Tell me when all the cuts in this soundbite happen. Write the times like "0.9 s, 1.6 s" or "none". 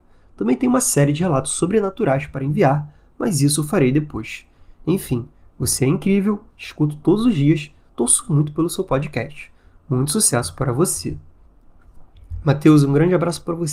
none